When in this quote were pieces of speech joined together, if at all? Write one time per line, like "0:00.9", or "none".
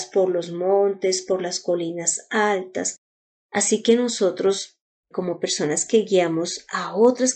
0:03.3